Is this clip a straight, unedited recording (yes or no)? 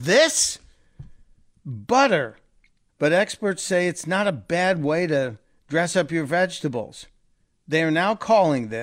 no